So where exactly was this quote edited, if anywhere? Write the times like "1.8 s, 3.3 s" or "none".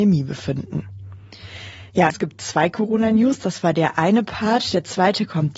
2.1 s